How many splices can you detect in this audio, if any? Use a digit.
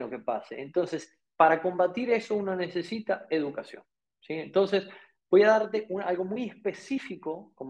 0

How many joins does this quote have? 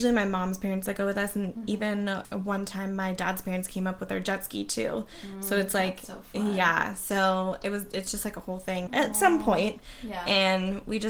1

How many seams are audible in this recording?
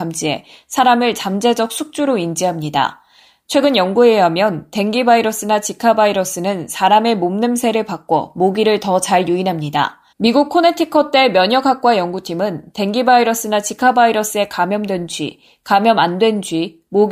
1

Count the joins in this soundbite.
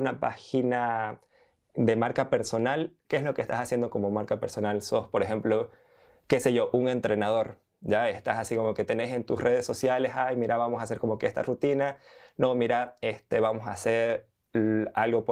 1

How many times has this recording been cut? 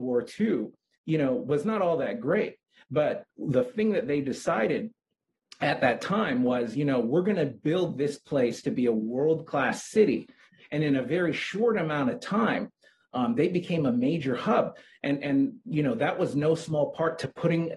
0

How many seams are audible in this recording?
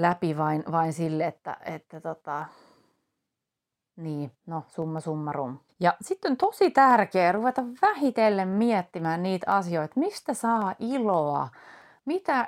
1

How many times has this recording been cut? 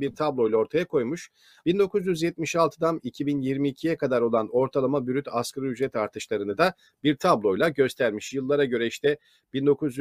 1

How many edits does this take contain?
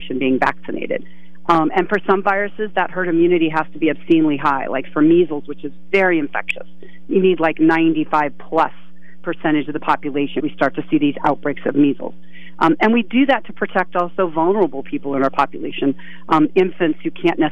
1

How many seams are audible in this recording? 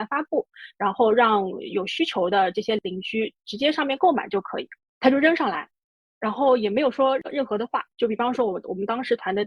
2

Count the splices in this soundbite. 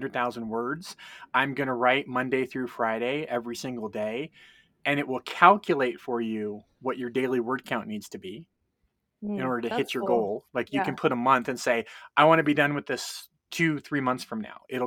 0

